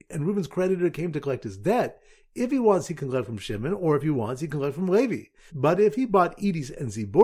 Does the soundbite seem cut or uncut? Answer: cut